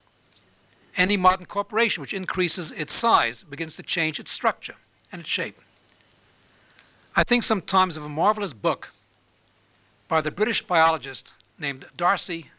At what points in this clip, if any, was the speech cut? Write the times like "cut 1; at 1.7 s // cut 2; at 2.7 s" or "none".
none